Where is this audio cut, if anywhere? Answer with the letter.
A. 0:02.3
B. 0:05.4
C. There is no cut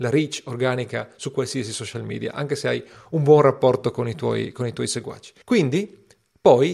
B